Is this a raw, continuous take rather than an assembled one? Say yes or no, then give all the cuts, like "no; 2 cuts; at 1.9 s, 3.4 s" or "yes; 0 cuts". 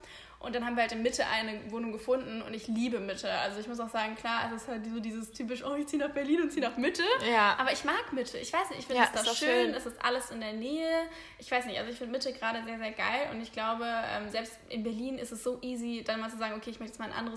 yes; 0 cuts